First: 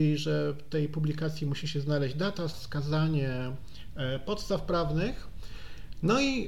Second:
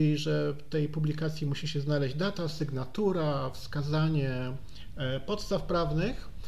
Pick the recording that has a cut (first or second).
first